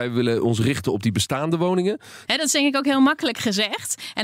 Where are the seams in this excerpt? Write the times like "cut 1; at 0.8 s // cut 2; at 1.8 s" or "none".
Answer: cut 1; at 2.3 s